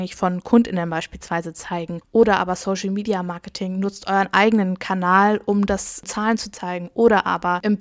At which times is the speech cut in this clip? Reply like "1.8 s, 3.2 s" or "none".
none